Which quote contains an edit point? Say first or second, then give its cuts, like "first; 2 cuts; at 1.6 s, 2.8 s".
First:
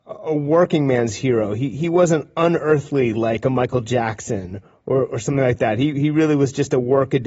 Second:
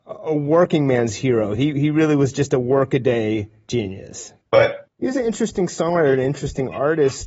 second; 2 cuts; at 1.6 s, 4.9 s